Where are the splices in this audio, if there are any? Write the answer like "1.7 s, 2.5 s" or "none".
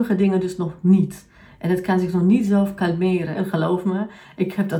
3.3 s